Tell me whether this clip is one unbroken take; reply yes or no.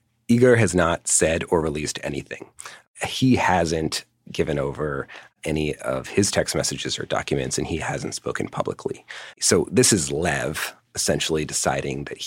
no